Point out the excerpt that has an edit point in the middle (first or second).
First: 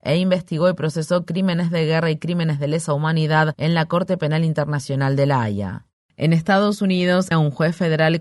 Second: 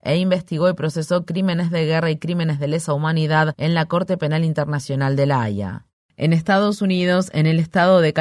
first